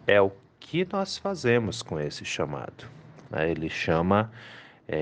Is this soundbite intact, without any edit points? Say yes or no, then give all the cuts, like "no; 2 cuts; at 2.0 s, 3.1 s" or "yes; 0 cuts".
no; 1 cut; at 3.3 s